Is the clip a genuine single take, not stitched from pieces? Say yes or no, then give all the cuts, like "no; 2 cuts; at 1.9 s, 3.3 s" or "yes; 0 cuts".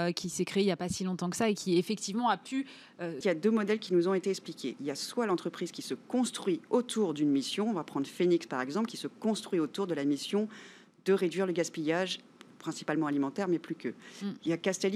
no; 1 cut; at 3.2 s